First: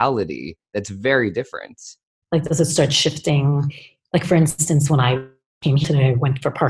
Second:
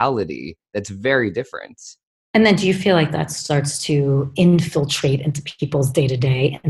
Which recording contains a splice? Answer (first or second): first